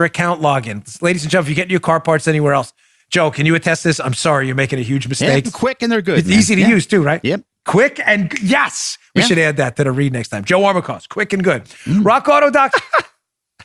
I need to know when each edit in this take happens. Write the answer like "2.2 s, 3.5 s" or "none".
5.4 s, 12.7 s